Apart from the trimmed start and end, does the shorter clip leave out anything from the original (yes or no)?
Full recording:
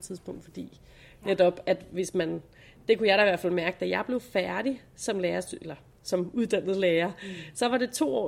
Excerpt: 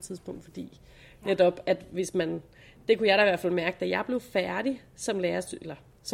no